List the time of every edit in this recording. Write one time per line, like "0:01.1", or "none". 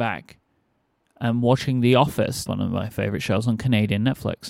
0:02.5